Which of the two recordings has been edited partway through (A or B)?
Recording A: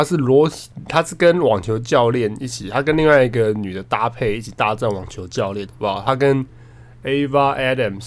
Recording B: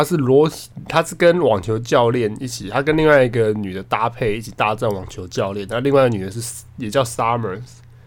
A